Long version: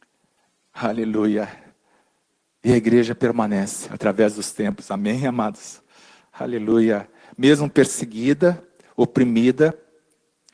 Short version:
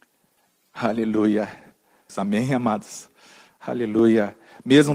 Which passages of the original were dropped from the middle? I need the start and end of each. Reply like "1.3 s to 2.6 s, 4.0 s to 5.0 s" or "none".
2.1 s to 4.8 s